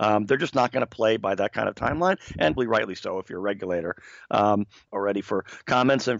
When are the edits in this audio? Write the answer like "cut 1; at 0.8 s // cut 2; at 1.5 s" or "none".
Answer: cut 1; at 2.6 s // cut 2; at 4.9 s